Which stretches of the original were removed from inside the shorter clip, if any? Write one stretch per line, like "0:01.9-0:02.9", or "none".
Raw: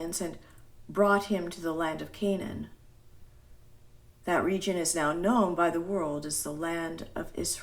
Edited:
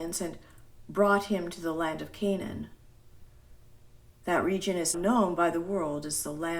0:04.9-0:05.1

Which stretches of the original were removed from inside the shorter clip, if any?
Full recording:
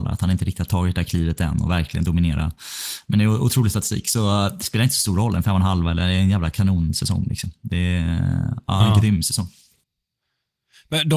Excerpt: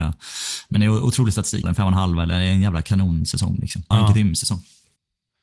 0:04.0-0:05.3
0:07.6-0:08.8

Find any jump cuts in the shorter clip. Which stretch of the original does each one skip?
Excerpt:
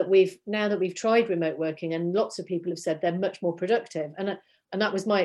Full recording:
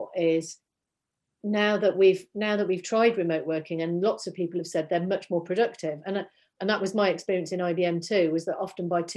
none

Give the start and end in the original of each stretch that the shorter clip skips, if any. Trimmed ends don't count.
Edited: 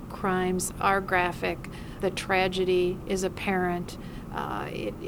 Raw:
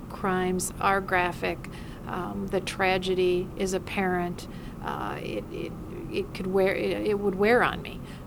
0:02.0-0:02.5

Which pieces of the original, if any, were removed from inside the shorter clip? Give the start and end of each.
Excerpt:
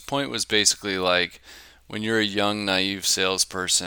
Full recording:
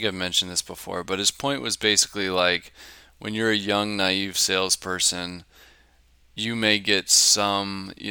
none

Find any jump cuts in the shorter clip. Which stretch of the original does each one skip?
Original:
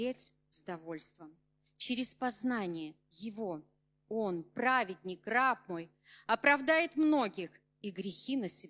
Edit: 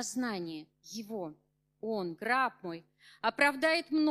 0:04.4-0:05.2

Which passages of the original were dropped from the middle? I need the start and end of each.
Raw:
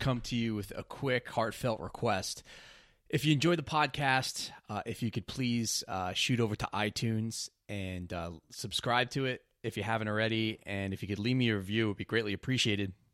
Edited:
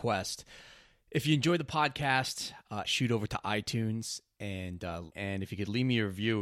0:04.8-0:06.1
0:08.4-0:10.6

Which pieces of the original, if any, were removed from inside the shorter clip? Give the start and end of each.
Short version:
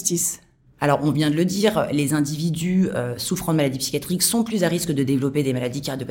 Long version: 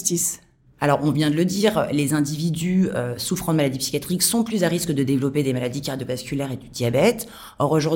none

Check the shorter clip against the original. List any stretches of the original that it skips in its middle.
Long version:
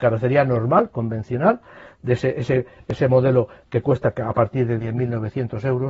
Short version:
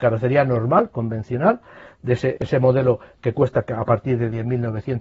0:02.3-0:02.8

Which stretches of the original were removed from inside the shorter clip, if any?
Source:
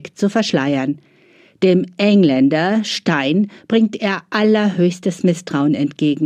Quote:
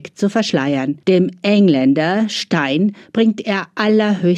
0:01.0-0:01.6

